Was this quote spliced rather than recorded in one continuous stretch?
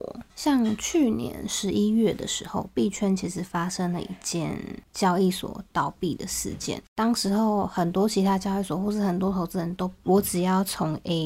yes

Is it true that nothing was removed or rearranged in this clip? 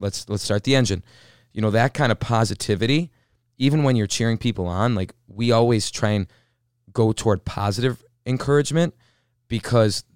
yes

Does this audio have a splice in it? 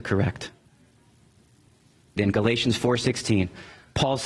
yes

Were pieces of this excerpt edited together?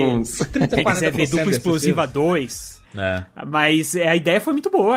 yes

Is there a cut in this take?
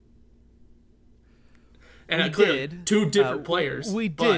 no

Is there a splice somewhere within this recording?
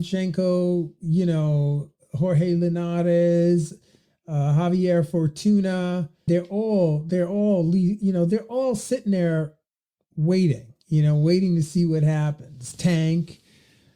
yes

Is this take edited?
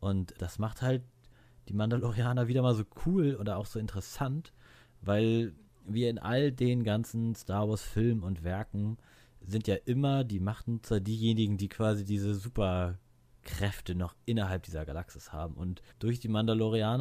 yes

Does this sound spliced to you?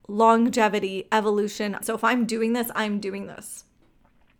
yes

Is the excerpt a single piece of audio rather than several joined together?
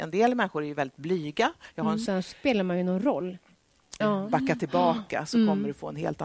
no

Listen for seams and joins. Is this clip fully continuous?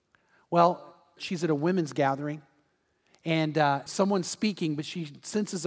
no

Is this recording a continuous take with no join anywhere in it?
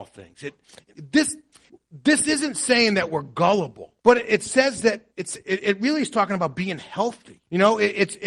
yes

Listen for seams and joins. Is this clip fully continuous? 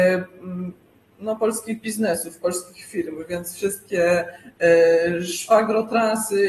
yes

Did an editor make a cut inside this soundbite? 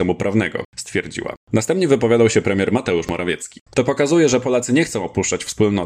yes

